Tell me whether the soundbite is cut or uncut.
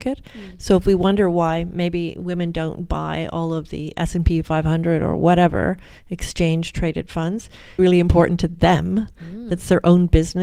cut